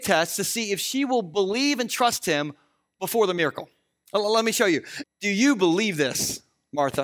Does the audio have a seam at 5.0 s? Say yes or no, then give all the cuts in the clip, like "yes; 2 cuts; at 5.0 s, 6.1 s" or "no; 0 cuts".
yes; 1 cut; at 5.0 s